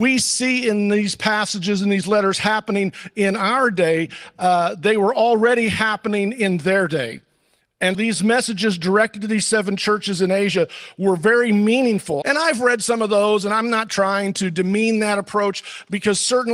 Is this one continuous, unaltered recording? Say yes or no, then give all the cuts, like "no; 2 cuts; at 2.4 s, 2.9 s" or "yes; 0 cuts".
no; 2 cuts; at 7.9 s, 12.2 s